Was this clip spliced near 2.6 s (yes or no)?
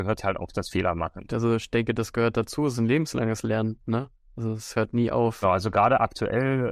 no